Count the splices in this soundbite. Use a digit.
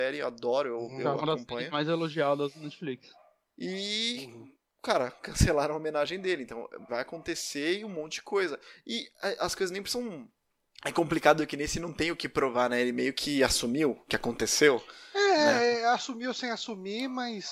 1